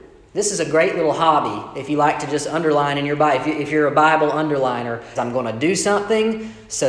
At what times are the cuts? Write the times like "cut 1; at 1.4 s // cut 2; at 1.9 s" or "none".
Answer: cut 1; at 5.2 s